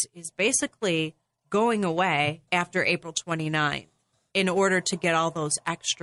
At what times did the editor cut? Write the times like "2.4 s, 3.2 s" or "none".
2.5 s